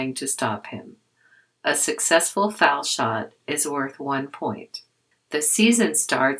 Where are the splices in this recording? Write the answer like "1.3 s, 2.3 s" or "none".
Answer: 5.1 s